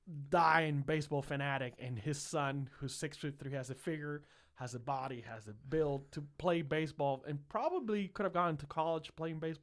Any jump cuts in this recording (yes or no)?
no